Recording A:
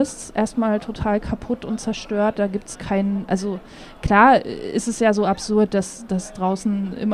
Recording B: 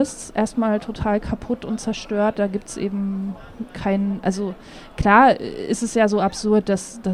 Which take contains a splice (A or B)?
A